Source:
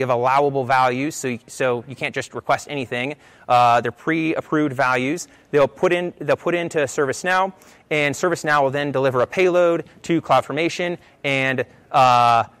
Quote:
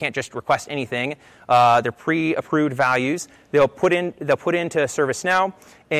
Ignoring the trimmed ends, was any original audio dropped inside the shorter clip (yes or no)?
no